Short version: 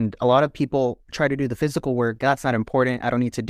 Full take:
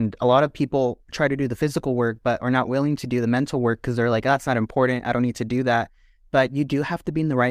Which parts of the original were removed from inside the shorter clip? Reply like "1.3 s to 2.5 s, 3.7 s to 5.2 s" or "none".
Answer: 2.2 s to 4.2 s